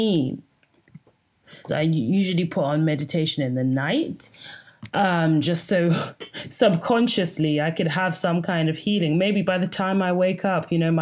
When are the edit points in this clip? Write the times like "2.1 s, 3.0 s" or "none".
1.7 s